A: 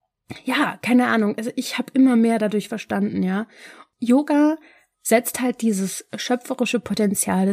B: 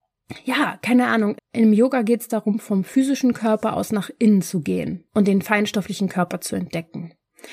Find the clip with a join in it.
B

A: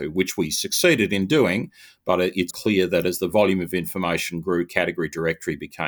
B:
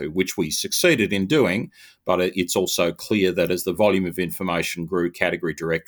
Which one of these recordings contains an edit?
A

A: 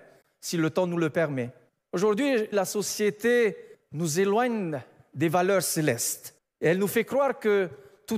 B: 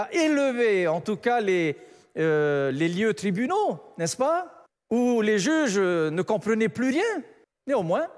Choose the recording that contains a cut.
A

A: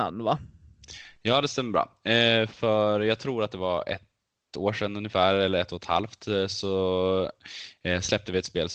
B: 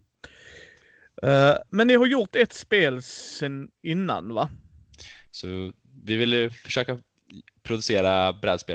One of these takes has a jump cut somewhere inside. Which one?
B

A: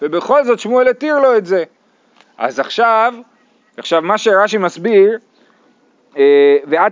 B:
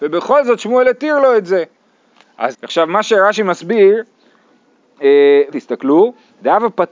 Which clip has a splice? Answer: B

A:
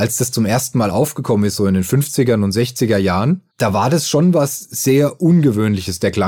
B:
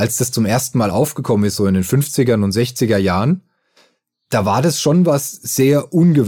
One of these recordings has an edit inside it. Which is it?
A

